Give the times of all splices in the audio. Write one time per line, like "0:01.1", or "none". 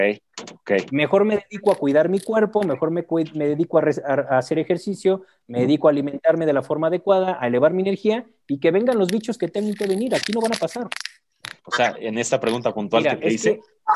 0:11.6